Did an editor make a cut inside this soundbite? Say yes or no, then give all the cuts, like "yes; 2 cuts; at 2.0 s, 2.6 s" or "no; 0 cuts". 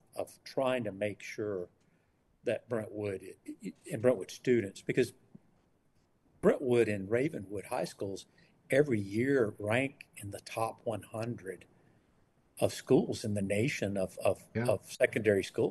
no; 0 cuts